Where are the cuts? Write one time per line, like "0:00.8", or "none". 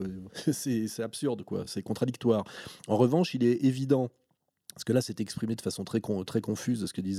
none